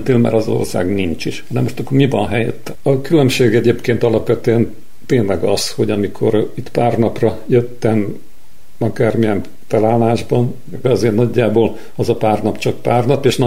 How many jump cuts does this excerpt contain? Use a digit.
2